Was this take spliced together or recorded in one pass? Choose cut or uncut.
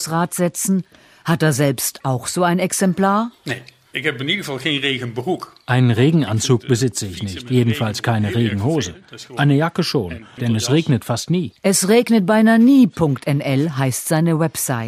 cut